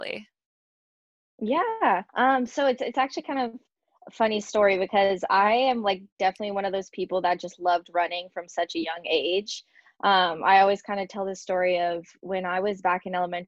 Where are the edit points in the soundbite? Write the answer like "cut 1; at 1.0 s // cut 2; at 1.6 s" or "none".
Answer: cut 1; at 2.1 s